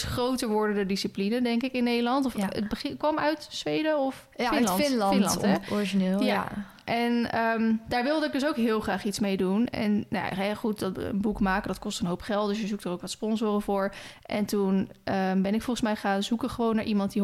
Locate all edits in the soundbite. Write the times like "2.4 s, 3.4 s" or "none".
none